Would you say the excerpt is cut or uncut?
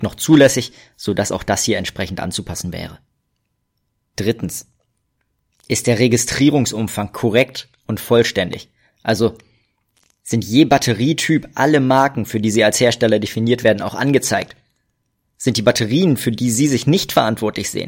uncut